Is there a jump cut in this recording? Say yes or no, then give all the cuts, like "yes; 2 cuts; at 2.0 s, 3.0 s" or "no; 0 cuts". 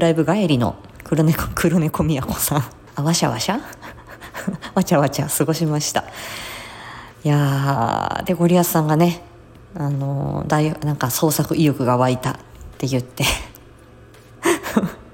yes; 1 cut; at 2.9 s